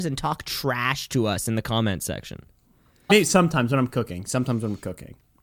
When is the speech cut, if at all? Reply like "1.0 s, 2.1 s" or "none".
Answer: 3.1 s